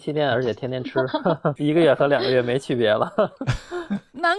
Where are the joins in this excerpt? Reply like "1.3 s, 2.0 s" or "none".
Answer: 1.6 s